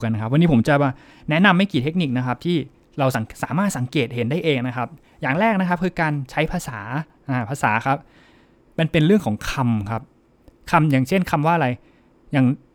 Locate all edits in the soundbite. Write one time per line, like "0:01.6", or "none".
none